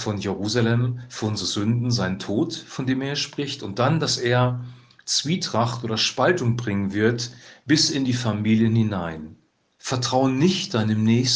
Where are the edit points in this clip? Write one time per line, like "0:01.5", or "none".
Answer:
0:09.6